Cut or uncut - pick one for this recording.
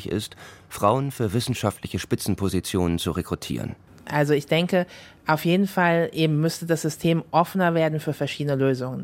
uncut